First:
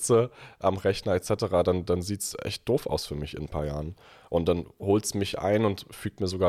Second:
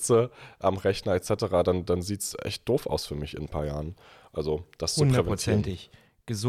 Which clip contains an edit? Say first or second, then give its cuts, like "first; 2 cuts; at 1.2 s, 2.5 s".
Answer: second; 1 cut; at 4.3 s